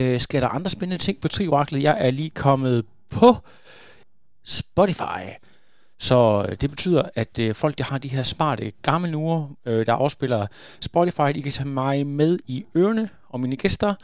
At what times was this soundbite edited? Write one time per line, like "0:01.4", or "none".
none